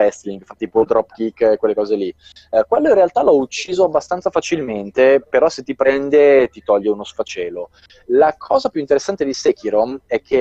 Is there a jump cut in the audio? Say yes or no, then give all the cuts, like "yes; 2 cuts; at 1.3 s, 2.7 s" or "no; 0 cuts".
no; 0 cuts